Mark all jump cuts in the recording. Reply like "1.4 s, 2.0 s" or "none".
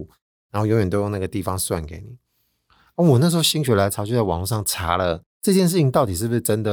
none

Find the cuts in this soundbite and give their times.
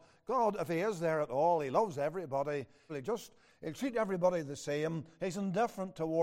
2.9 s

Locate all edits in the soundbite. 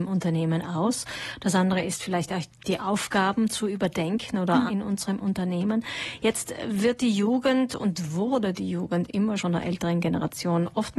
4.7 s, 9.4 s

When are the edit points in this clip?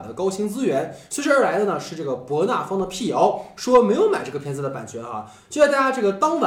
none

